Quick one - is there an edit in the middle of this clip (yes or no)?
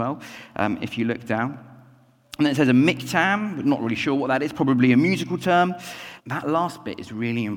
yes